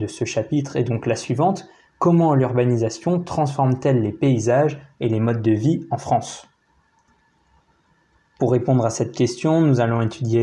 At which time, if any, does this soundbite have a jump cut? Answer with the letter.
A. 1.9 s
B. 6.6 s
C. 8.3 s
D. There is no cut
D